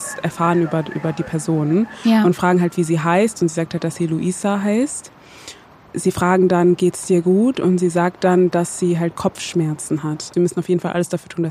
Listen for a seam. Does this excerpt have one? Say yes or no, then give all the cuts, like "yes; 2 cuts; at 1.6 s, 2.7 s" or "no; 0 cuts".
yes; 1 cut; at 10.3 s